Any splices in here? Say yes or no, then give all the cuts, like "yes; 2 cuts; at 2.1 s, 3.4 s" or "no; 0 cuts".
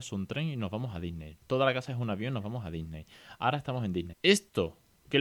yes; 1 cut; at 4.1 s